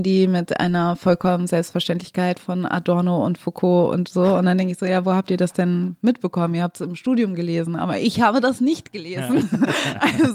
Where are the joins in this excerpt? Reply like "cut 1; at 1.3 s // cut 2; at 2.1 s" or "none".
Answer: none